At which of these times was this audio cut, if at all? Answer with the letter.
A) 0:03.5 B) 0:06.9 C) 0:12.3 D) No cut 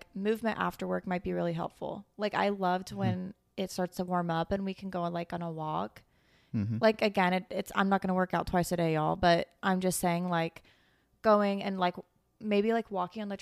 D